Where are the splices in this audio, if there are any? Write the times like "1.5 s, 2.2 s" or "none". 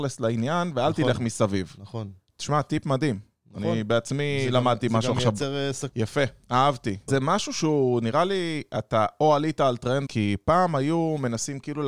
5.9 s, 7.1 s, 10.1 s